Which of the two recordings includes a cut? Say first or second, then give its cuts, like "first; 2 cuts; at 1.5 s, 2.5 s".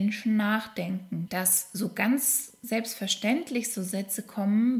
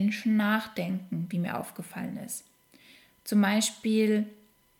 first; 1 cut; at 1.3 s